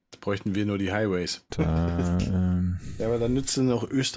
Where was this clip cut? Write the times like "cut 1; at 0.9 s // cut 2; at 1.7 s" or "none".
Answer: cut 1; at 1.5 s